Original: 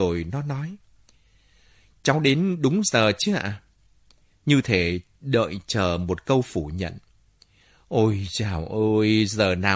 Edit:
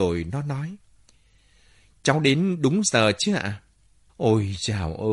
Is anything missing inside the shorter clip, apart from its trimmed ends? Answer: yes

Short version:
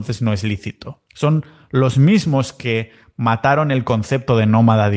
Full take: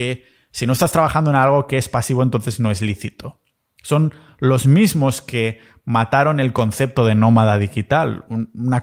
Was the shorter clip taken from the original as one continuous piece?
no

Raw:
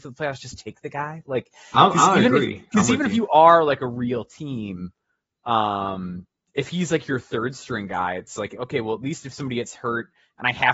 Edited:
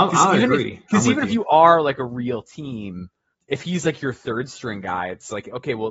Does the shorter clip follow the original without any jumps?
no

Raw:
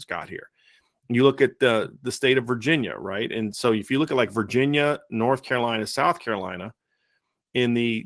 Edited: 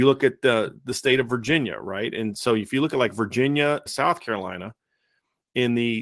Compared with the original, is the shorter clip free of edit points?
no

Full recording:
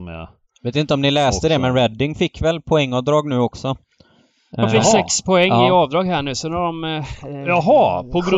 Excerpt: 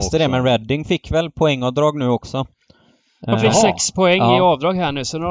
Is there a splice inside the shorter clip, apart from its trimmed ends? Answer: no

